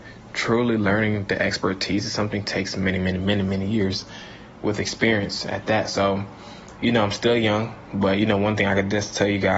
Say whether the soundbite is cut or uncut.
cut